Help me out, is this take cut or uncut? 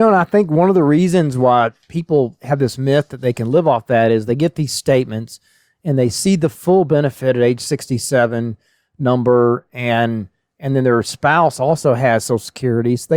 uncut